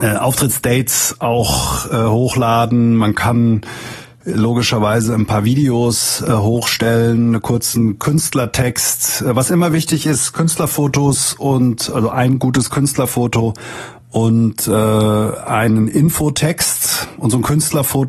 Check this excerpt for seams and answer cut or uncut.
uncut